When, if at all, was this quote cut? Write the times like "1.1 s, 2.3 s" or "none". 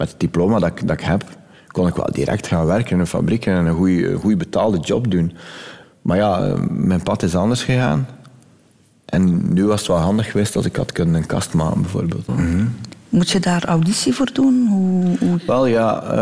12.3 s